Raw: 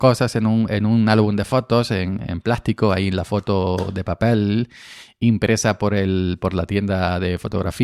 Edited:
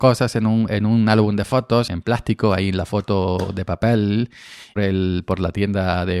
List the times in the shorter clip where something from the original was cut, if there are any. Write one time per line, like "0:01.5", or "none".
0:01.9
0:04.8